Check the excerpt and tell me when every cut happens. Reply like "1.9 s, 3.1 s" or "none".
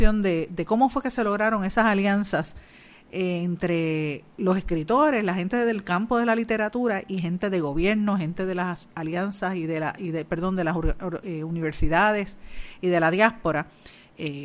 none